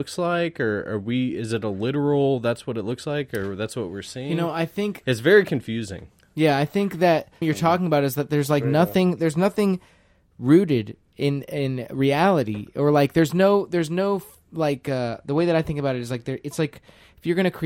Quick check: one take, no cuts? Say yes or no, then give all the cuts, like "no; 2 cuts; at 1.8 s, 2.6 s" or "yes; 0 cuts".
no; 1 cut; at 7.4 s